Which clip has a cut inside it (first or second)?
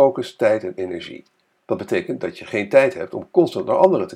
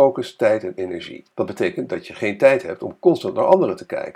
second